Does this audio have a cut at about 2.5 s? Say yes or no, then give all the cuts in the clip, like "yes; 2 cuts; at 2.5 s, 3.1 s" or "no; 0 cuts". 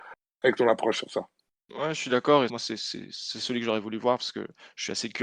yes; 1 cut; at 2.5 s